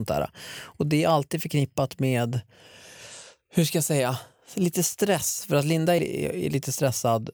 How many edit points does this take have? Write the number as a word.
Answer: one